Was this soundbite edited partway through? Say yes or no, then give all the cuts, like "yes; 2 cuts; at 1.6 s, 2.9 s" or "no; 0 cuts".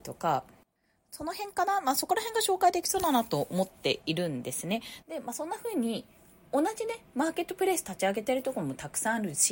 yes; 1 cut; at 5.0 s